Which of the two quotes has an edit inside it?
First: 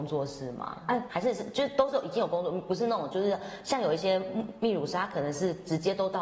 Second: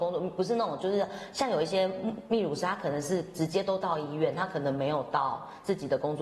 first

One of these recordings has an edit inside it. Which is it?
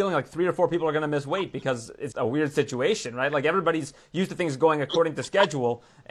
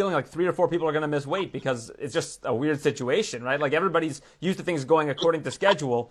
first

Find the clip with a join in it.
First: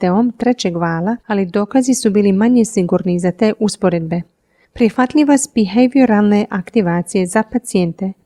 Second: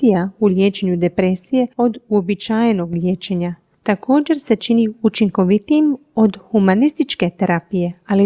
first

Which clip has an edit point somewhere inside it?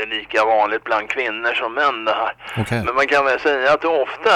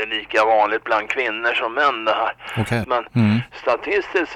second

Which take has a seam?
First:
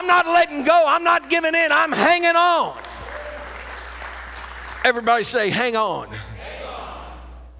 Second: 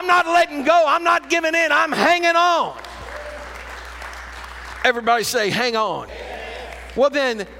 second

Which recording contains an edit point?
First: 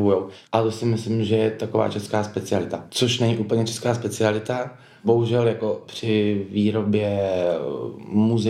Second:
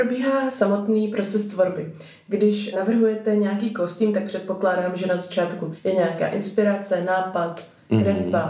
first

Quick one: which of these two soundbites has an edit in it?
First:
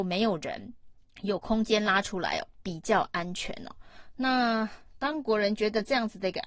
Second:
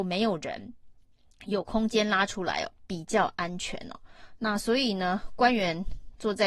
first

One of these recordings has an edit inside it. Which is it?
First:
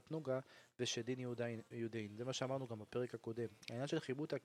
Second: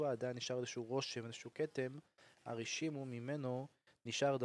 second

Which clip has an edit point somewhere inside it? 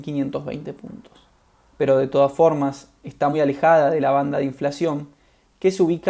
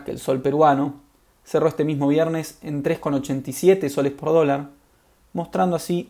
first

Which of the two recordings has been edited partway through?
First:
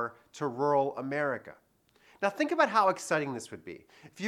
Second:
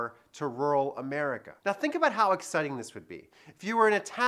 second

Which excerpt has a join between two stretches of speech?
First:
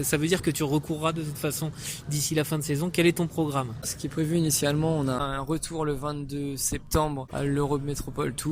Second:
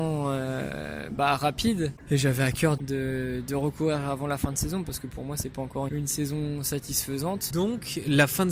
second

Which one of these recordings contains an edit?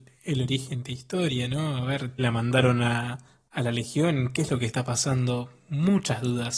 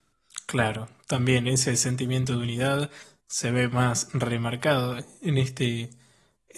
first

